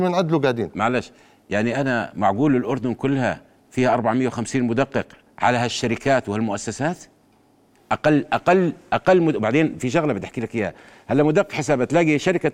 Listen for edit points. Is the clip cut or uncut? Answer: uncut